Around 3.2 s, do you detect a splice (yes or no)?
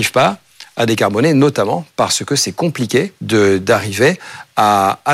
yes